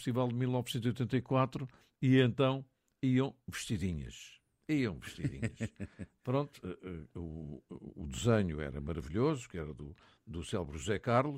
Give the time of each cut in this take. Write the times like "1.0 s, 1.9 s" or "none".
none